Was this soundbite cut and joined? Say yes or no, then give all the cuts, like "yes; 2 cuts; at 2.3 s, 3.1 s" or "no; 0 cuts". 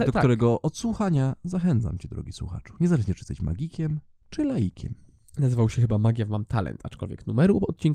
no; 0 cuts